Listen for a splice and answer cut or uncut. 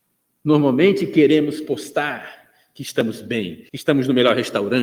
cut